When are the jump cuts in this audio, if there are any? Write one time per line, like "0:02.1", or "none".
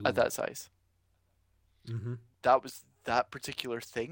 0:02.3